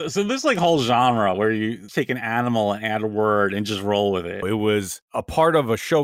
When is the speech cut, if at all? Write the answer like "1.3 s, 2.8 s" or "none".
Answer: 1.9 s, 4.4 s